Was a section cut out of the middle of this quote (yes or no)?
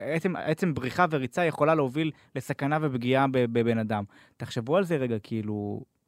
no